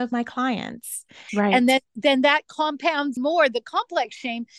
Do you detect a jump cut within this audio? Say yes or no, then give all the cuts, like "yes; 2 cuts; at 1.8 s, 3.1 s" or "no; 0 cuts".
yes; 2 cuts; at 1.3 s, 3.2 s